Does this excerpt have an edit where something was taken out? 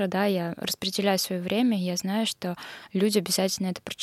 no; 0 cuts

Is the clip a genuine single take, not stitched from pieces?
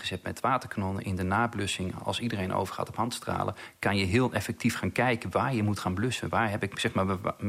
yes; 0 cuts

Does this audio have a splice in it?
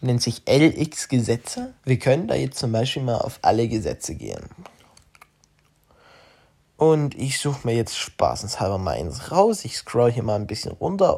yes; 1 cut; at 1.8 s

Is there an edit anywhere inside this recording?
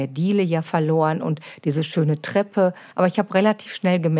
yes; 1 cut; at 2.9 s

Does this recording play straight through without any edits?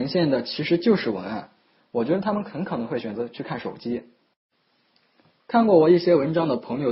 no; 2 cuts; at 1.8 s, 5.4 s

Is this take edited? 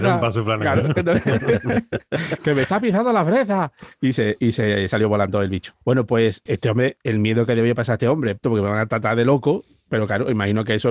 yes; 2 cuts; at 6.5 s, 8.4 s

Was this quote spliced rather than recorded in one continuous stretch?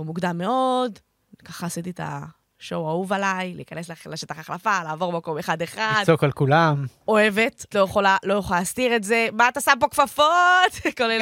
yes; 1 cut; at 7.7 s

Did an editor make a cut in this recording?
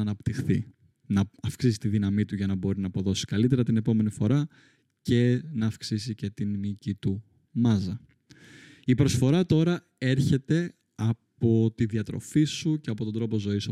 no; 0 cuts

